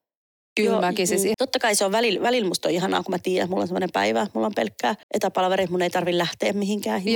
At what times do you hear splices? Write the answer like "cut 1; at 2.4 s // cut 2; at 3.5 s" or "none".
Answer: cut 1; at 1.3 s // cut 2; at 5.0 s